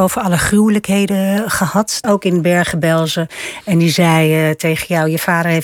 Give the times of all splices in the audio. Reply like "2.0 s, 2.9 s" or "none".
2.0 s